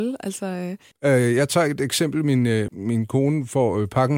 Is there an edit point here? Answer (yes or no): yes